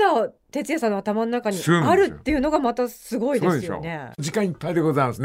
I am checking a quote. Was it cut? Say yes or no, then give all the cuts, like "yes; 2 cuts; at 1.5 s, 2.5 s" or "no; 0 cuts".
no; 0 cuts